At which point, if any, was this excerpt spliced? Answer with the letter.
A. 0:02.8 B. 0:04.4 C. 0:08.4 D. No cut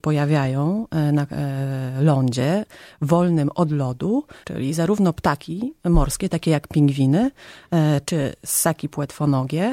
B